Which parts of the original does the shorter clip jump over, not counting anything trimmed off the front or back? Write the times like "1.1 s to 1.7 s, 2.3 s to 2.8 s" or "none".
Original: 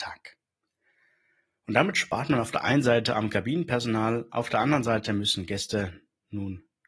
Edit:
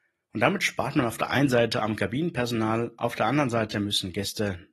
none